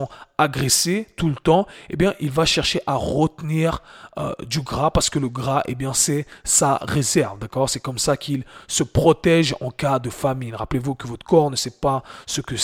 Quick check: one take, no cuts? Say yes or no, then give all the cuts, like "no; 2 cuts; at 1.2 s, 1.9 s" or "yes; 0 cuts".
yes; 0 cuts